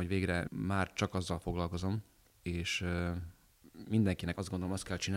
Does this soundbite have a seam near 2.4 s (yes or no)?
no